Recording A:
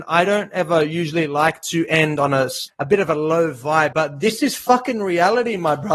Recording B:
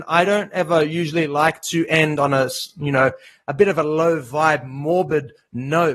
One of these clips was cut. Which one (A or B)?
A